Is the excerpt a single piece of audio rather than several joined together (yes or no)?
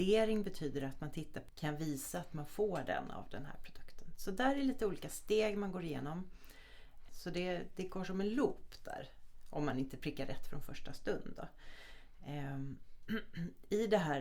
no